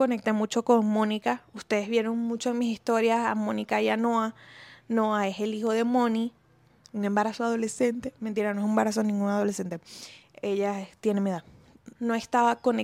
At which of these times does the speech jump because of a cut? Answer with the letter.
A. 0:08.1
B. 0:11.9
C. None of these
B